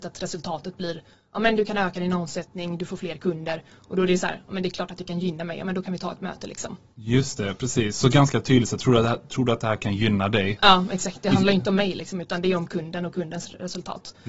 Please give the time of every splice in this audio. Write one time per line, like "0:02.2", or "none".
none